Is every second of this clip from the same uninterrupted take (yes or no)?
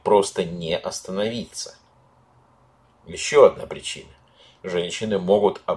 yes